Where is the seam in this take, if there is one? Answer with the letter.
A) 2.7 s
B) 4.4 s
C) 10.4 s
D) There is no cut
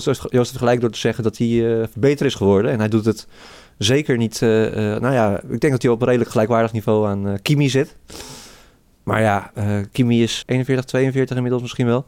C